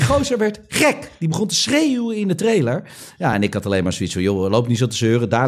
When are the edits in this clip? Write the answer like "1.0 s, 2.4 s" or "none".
none